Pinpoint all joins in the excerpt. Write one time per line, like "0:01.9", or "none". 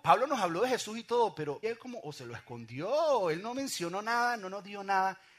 0:01.6